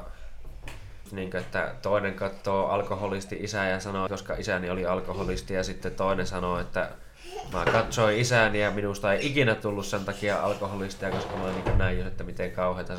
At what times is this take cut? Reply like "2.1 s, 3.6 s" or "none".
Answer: 1.1 s, 4.1 s

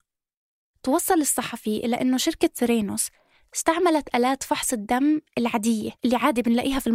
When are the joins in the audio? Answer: 6.0 s

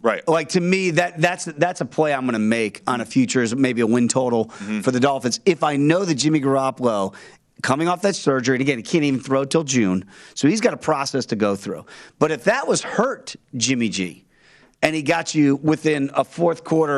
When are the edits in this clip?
none

